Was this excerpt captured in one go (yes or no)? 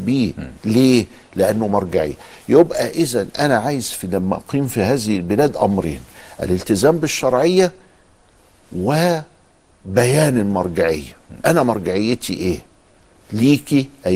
yes